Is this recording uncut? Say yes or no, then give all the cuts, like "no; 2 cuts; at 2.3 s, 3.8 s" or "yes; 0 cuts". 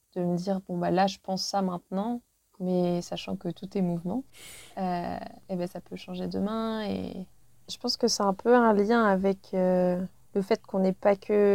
yes; 0 cuts